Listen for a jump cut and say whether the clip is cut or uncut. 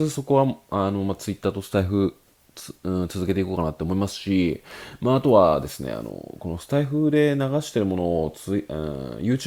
uncut